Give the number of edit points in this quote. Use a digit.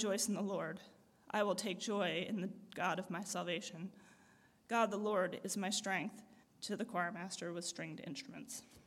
1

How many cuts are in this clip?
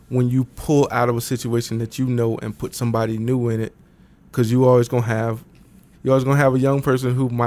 1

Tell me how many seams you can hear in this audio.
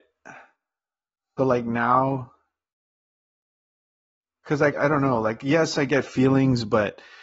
2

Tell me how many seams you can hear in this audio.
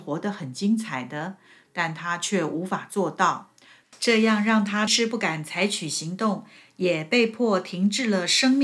2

